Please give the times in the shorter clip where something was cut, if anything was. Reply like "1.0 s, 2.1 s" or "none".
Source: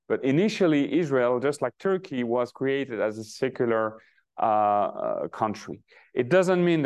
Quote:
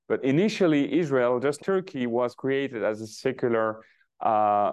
1.6 s